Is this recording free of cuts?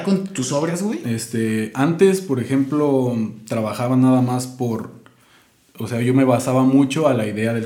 yes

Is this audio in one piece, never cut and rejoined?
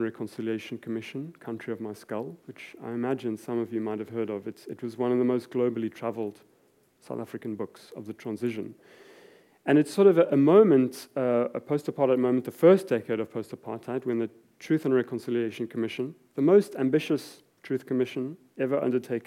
yes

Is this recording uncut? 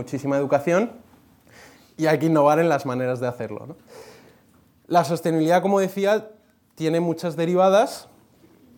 yes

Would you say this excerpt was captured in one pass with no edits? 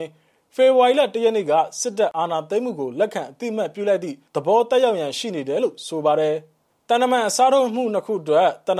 no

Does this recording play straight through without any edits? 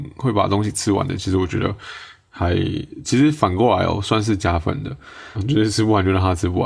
no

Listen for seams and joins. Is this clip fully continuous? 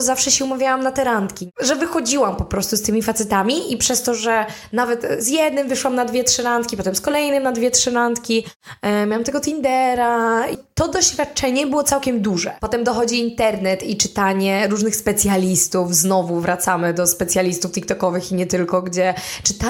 yes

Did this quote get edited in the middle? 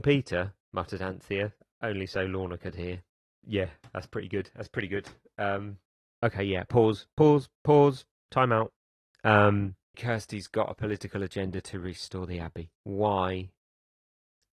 yes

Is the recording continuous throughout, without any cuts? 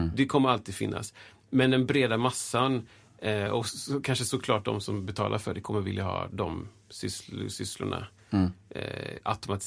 yes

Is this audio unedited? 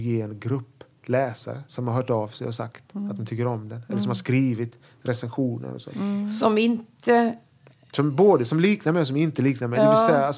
yes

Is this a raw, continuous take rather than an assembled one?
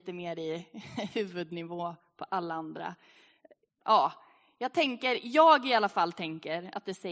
yes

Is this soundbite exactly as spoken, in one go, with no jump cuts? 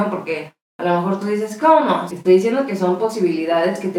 no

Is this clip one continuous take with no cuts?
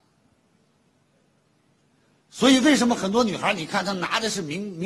yes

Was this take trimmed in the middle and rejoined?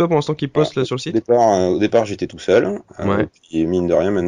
no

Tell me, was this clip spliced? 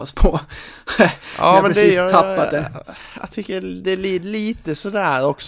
no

